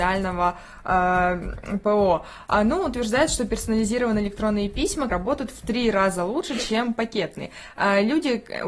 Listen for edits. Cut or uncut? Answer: cut